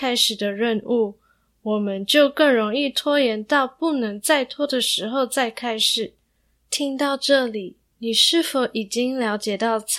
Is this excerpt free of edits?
no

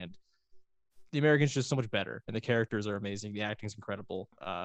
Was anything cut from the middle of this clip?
no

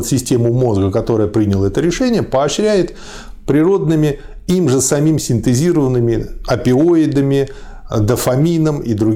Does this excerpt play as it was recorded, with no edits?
yes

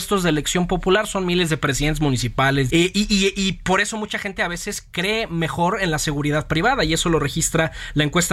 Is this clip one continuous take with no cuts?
no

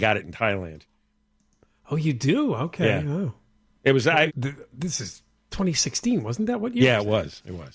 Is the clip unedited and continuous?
no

